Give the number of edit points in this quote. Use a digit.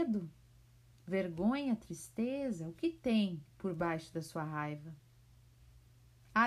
0